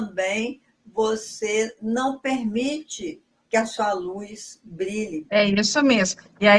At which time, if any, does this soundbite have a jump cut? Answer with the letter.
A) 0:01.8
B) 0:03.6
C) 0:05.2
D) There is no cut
C